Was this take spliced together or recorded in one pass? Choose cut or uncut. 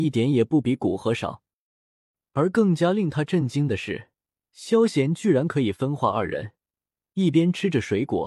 uncut